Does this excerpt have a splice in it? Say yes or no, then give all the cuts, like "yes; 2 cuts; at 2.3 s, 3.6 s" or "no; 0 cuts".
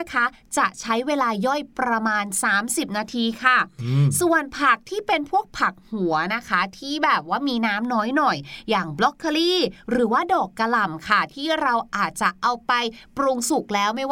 no; 0 cuts